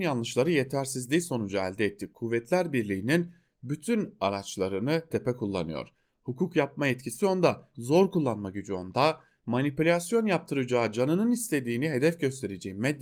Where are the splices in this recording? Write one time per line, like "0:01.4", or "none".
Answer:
0:05.1
0:07.7